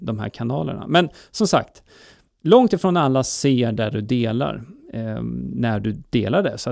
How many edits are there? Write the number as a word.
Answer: zero